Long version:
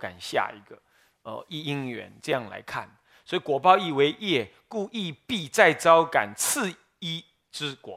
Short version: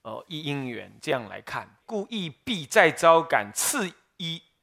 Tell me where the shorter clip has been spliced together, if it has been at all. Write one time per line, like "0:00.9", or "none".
0:01.8